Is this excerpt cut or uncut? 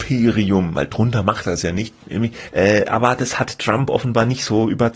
cut